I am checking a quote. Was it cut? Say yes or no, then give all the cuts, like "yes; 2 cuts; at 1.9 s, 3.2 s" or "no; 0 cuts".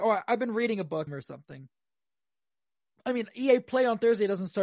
yes; 1 cut; at 1.1 s